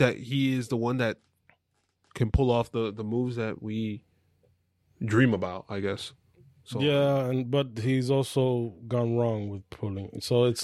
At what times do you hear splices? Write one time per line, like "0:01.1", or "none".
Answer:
none